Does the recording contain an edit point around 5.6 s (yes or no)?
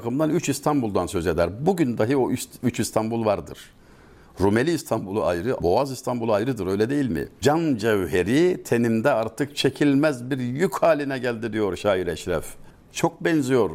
yes